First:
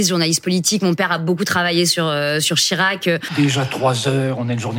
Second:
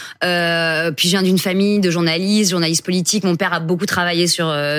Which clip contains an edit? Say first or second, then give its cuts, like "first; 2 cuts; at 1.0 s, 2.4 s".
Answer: first; 1 cut; at 3.3 s